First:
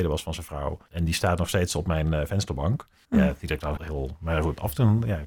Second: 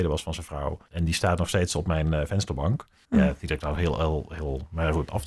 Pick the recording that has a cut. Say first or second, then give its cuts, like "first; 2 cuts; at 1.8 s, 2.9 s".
first; 1 cut; at 3.8 s